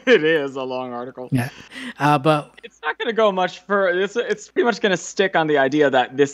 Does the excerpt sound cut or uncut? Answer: cut